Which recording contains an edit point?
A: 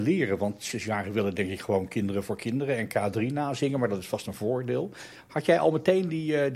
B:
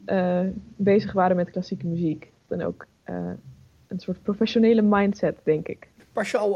B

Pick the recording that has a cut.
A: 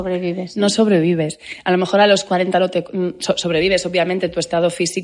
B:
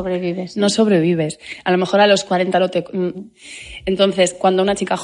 B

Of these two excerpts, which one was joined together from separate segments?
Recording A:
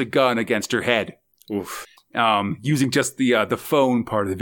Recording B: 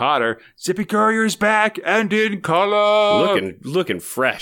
A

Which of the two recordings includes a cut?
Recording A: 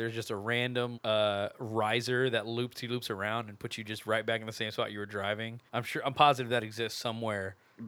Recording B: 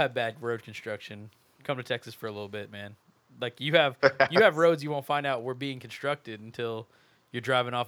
A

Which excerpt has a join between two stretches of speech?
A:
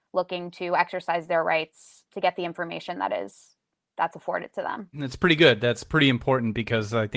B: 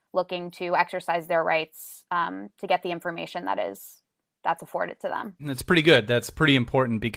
A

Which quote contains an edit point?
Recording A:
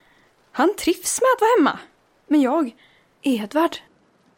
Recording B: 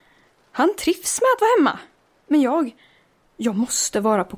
A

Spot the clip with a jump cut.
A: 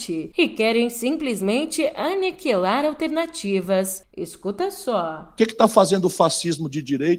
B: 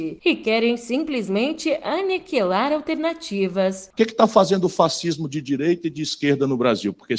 B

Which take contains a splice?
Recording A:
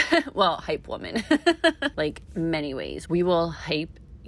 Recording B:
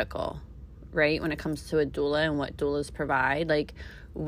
A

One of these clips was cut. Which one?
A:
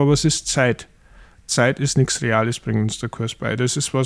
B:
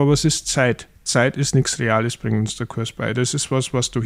B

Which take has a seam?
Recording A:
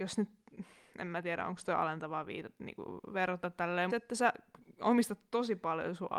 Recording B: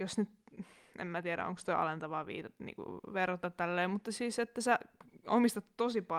A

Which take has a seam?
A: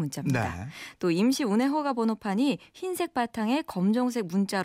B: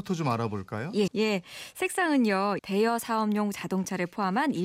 B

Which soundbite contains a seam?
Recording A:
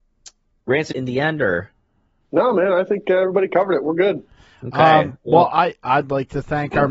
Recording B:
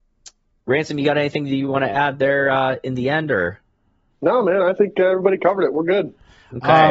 A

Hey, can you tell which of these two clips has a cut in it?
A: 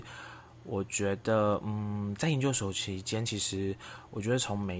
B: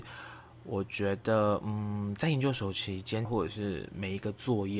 B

